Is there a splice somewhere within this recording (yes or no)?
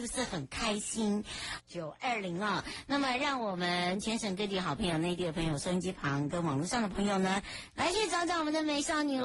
yes